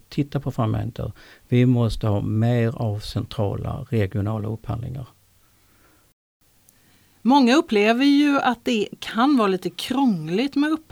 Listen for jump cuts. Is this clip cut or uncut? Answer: uncut